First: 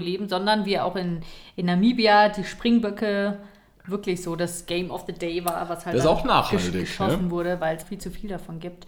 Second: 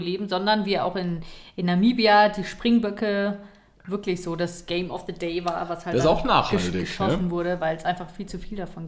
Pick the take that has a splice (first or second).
first